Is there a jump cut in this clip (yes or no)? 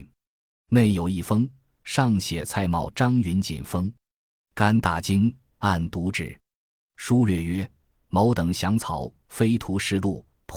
no